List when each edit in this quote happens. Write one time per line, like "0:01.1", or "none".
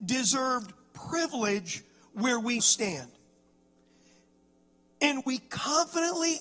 0:02.6